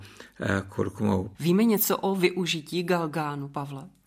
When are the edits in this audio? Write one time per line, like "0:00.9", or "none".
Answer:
0:01.3